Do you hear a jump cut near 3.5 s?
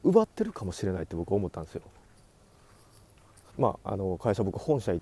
yes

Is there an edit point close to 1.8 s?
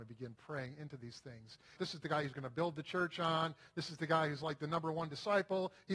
yes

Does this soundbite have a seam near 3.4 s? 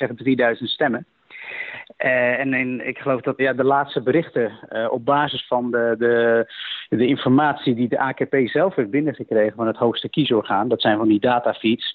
yes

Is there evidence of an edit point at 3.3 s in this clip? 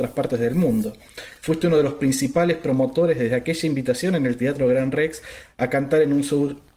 no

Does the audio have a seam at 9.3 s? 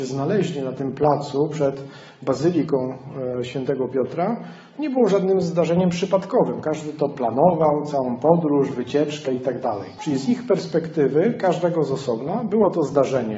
yes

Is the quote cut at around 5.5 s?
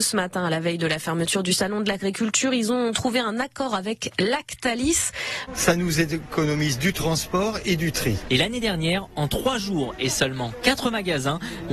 yes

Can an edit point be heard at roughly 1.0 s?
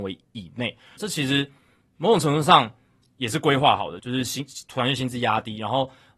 yes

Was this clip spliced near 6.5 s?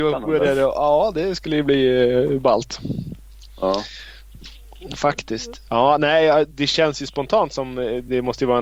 yes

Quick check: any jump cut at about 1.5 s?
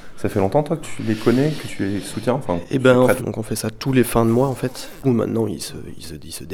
no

